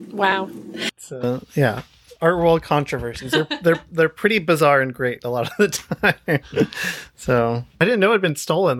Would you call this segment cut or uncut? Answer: uncut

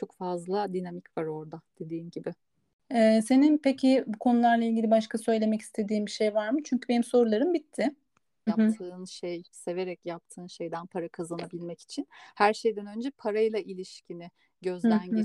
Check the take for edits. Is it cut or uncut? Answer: cut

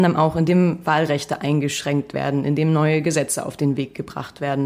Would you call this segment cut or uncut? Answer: uncut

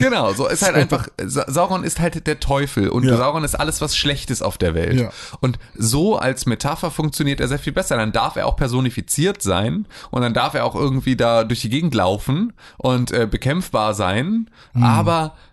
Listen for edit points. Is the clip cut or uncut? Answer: uncut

